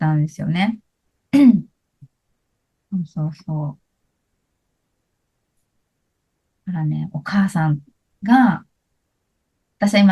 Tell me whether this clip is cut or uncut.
uncut